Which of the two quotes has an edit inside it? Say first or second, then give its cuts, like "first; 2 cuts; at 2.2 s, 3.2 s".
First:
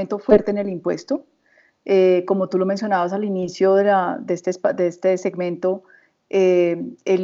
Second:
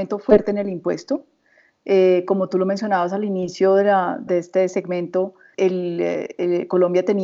second; 2 cuts; at 4.3 s, 5.5 s